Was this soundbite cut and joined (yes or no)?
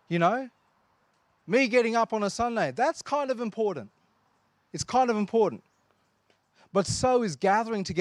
no